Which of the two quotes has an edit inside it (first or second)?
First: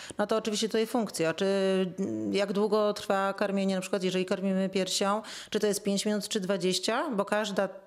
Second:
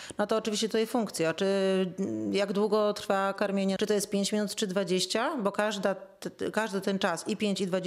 second